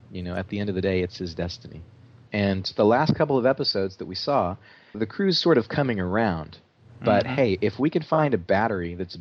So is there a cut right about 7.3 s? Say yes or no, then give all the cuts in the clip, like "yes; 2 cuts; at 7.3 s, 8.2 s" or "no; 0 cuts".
no; 2 cuts; at 2.3 s, 4.9 s